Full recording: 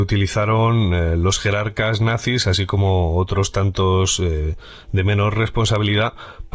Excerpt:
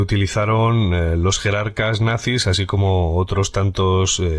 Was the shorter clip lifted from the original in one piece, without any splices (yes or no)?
yes